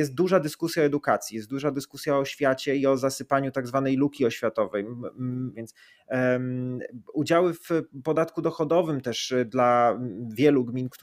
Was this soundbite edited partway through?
yes; 1 cut; at 5.5 s

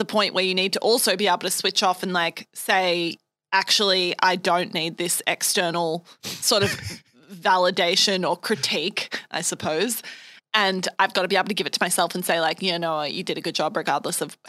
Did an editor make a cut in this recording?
no; 0 cuts

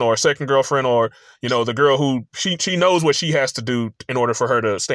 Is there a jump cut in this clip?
no; 0 cuts

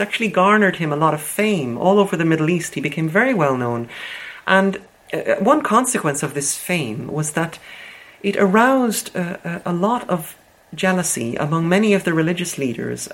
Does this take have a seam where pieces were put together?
no; 0 cuts

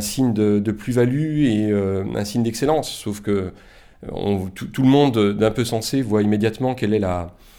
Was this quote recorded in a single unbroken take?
yes; 0 cuts

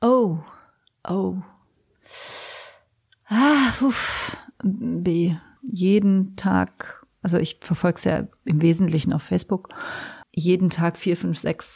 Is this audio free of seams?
no; 2 cuts; at 5.6 s, 10.2 s

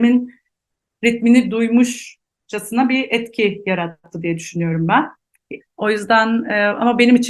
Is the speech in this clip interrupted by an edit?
yes; 1 cut; at 5.6 s

